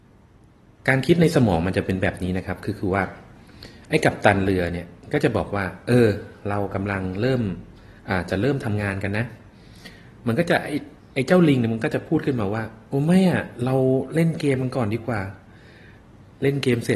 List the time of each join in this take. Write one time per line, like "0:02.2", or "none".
none